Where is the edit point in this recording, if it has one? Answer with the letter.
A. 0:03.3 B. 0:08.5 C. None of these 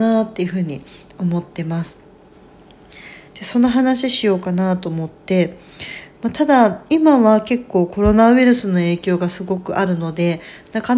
A